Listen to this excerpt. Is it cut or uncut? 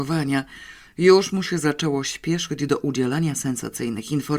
uncut